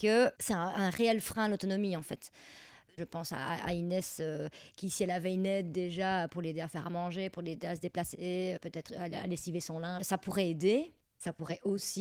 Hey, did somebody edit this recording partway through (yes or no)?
yes